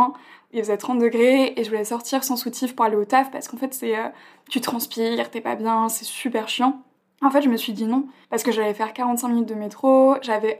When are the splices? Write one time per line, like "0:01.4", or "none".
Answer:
none

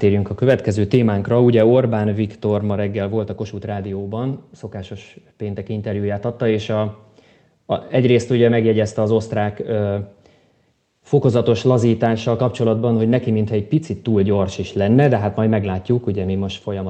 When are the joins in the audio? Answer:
none

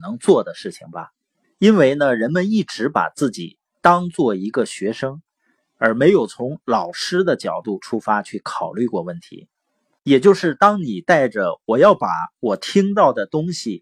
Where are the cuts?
0:01.4

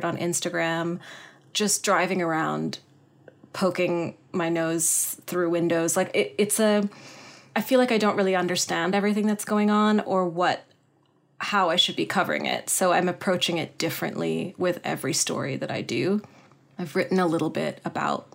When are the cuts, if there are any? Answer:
none

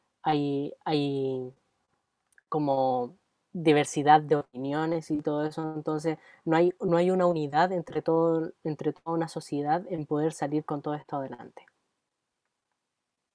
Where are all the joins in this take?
none

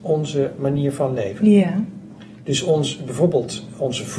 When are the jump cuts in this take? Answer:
none

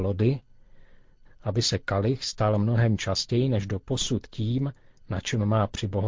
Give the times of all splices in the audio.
0:01.3

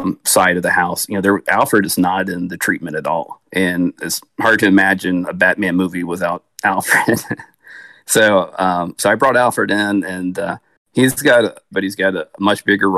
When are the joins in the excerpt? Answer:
0:03.5
0:11.7

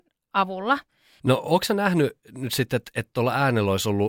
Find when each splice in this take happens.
0:01.2

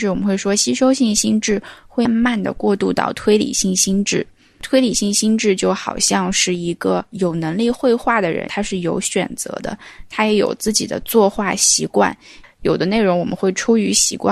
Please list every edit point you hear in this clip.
0:02.1
0:08.5
0:12.4

